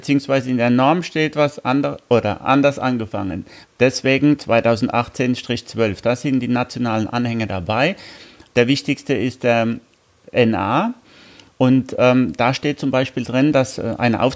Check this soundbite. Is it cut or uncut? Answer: cut